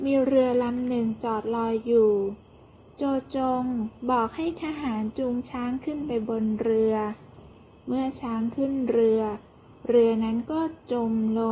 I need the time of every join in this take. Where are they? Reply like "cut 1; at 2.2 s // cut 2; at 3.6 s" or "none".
none